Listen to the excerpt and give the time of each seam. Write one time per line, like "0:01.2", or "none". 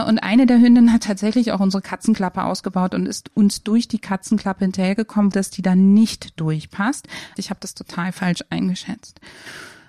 0:05.3
0:07.3